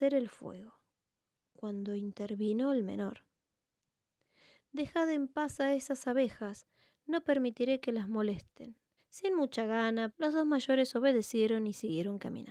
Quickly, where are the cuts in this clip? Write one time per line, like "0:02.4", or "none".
0:09.0
0:10.1